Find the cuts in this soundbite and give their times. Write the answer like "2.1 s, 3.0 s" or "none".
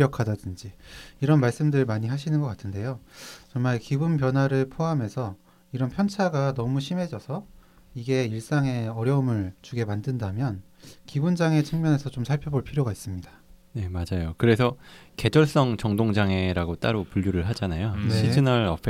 9.6 s